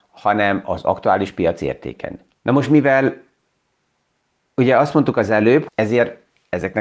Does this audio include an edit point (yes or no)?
yes